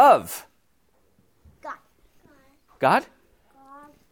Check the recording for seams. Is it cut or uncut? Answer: uncut